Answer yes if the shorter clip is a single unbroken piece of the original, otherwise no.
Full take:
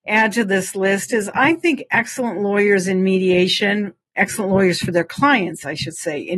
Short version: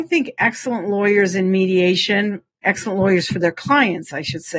yes